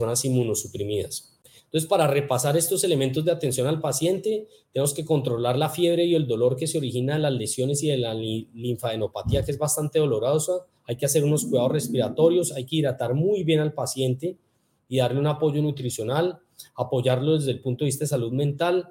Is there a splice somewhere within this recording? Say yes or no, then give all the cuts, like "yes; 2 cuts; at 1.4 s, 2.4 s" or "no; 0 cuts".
yes; 1 cut; at 10.8 s